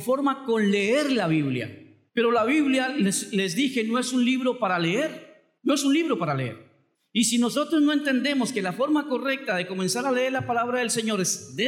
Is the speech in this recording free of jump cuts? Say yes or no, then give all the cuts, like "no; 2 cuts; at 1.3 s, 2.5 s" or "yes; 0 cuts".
yes; 0 cuts